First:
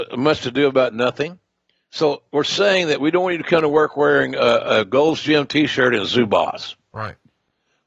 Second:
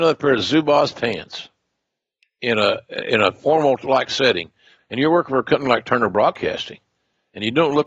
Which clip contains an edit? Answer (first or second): second